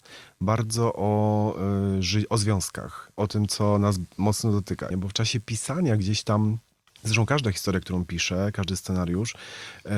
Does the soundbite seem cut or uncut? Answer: cut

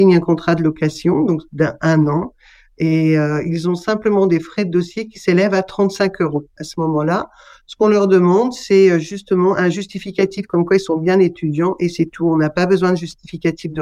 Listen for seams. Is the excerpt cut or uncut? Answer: uncut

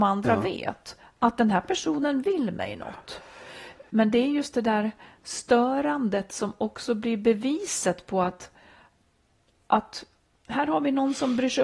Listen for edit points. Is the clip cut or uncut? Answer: cut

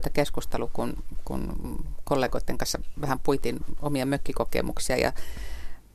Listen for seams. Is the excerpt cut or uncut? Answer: uncut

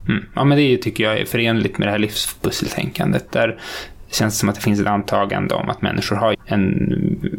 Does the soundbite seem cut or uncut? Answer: cut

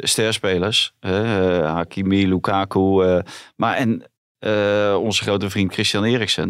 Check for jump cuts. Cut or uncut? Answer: uncut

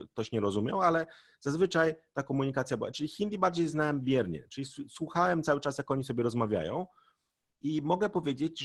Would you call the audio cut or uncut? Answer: uncut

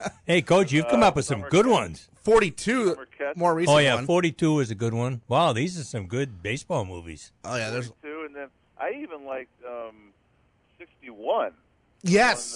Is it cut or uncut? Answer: uncut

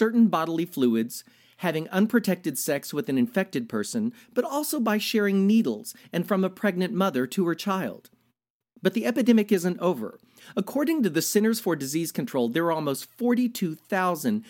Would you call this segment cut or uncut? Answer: cut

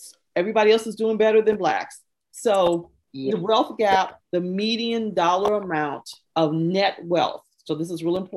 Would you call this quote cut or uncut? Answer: cut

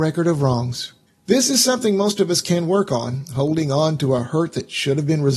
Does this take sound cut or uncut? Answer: cut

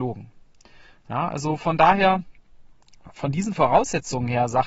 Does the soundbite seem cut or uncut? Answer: uncut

